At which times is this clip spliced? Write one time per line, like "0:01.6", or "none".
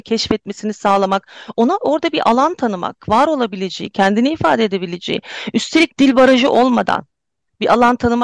none